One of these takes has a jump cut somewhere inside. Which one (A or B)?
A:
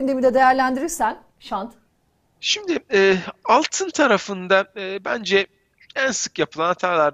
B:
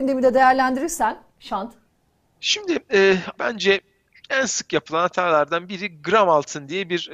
B